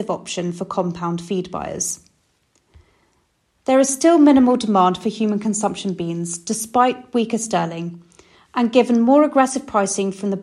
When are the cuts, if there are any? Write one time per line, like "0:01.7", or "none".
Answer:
none